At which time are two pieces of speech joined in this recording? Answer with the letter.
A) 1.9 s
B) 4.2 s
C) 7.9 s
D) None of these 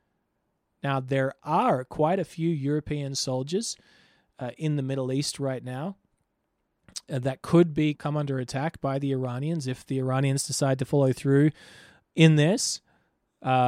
C